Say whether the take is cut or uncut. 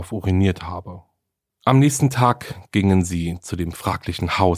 cut